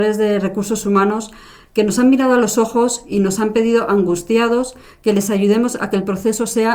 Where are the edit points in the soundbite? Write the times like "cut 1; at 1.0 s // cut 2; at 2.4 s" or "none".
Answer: none